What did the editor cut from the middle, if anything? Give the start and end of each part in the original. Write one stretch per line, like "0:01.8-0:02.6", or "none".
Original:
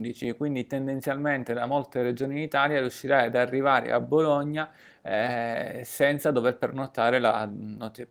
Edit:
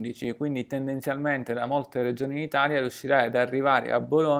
none

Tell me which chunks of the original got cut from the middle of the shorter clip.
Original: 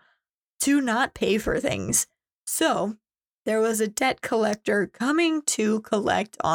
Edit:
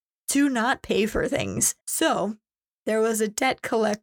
0:02.1-0:02.4

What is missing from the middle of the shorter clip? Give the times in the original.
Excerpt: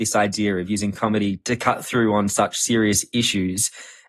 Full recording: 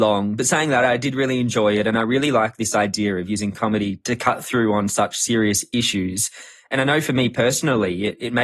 none

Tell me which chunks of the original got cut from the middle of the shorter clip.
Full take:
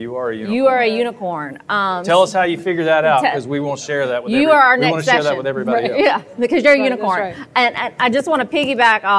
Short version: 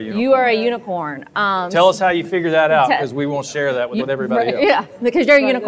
0:04.3-0:05.4

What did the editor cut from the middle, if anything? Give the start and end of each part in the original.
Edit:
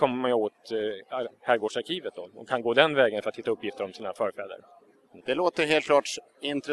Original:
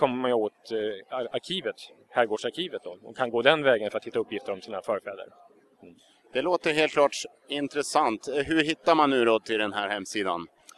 0:01.3-0:02.0
0:05.9-0:06.3

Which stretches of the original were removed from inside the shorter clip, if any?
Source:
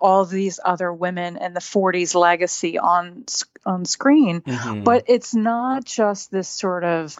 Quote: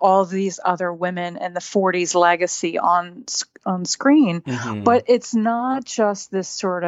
none

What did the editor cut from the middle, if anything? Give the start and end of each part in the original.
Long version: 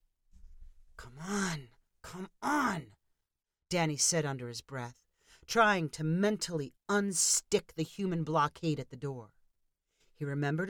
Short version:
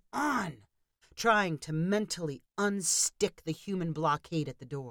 0:03.3-0:05.3

